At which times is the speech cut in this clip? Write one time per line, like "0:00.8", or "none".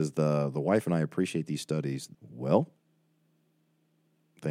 0:02.1